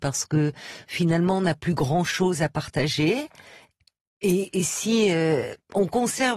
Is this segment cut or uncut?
uncut